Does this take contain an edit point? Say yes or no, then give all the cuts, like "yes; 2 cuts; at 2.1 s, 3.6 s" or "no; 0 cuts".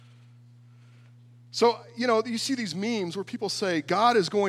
no; 0 cuts